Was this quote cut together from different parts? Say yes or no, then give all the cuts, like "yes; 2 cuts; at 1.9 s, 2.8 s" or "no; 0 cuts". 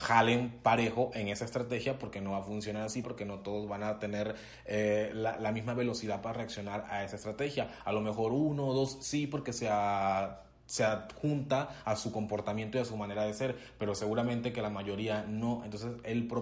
yes; 1 cut; at 3.0 s